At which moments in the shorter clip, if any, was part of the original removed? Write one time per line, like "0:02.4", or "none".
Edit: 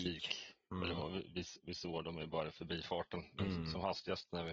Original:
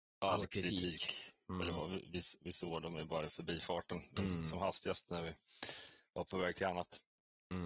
none